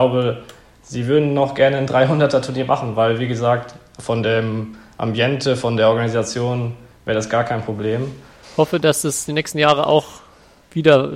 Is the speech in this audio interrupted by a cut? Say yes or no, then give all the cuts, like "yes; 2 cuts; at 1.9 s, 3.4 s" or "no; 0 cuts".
yes; 1 cut; at 8.4 s